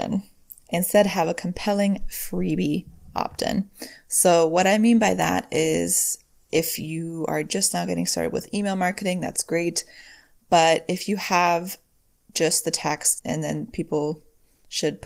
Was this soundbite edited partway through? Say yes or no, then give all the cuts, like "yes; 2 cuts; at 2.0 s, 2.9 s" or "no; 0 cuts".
yes; 1 cut; at 13.2 s